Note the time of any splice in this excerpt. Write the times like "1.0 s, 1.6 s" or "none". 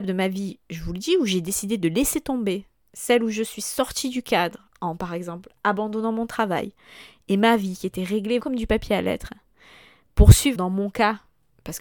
8.4 s, 10.5 s